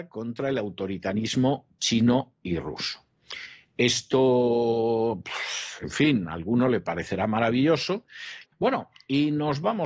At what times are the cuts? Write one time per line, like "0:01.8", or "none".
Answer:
0:08.4

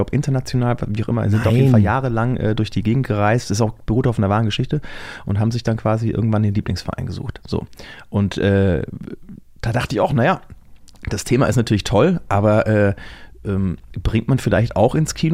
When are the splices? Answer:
none

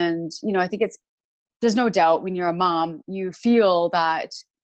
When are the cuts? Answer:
0:03.0

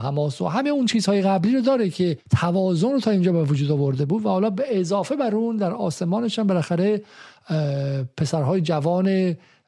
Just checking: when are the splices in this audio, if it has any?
0:02.3

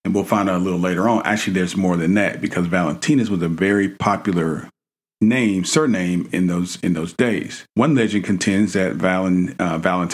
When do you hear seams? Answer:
0:07.7

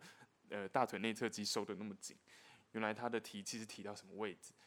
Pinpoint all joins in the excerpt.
none

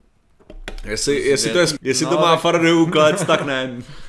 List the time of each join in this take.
0:01.8

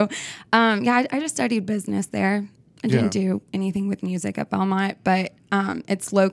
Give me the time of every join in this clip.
none

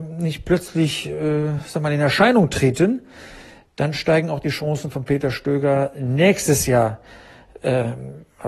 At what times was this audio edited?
none

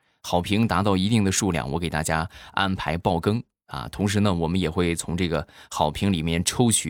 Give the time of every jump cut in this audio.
none

